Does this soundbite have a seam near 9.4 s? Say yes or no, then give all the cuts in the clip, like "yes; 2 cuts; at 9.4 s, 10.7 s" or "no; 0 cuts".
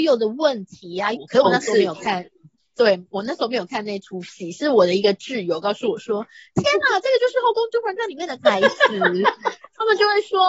no; 1 cut; at 1.1 s